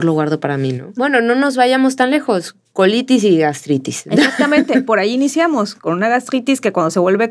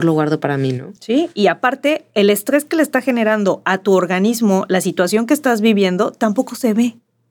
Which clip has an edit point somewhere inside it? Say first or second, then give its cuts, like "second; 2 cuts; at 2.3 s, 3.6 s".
first; 2 cuts; at 1.0 s, 5.8 s